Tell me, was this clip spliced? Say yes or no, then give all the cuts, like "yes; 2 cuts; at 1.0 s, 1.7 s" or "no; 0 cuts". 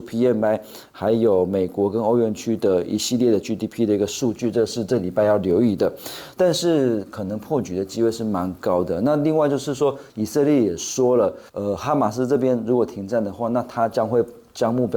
yes; 3 cuts; at 6.3 s, 10.1 s, 11.5 s